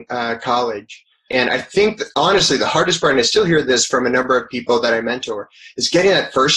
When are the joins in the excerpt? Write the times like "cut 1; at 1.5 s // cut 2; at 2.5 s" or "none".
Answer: cut 1; at 1.3 s